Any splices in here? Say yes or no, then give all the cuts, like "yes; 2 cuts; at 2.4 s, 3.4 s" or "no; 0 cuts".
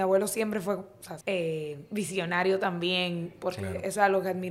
yes; 1 cut; at 1.2 s